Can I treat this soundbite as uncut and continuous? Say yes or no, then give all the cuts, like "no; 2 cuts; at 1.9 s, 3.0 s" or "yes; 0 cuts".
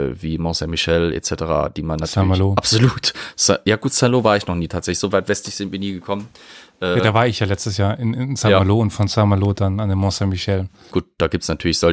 no; 1 cut; at 10.9 s